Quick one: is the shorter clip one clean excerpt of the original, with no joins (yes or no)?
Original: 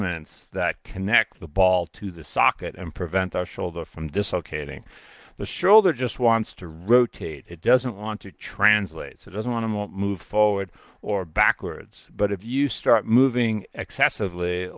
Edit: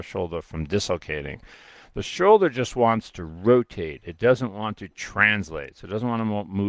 yes